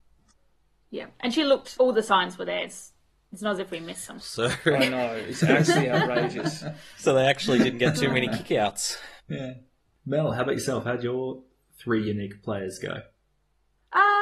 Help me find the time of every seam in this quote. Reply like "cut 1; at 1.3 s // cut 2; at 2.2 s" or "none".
cut 1; at 1.8 s // cut 2; at 4.2 s // cut 3; at 9.2 s